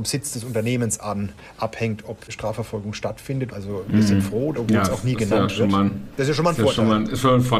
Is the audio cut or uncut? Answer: cut